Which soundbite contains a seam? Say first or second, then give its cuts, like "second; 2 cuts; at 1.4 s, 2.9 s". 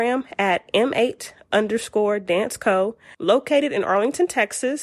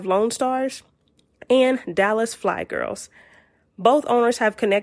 first; 1 cut; at 3.1 s